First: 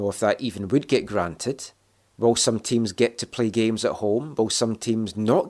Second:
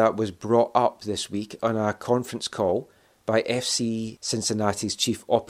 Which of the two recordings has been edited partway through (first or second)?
first